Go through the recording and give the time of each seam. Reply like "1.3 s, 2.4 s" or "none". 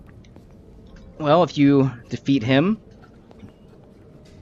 none